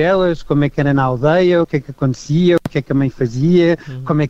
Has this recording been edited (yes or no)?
no